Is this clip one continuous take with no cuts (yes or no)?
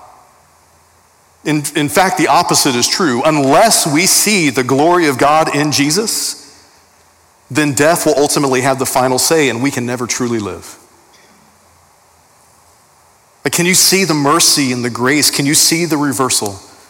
yes